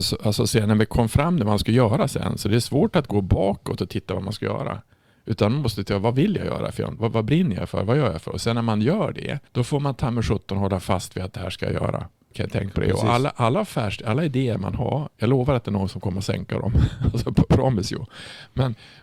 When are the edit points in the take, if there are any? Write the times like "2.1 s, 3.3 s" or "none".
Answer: 7.0 s, 9.5 s, 12.3 s